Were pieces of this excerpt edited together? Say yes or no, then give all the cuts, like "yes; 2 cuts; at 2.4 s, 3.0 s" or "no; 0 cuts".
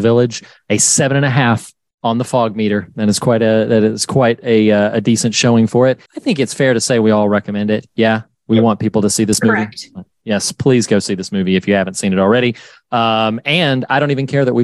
yes; 1 cut; at 6.1 s